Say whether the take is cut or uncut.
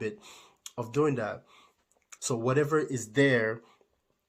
cut